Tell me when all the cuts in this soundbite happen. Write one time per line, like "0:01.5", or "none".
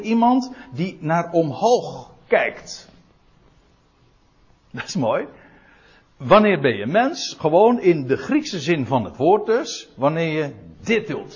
none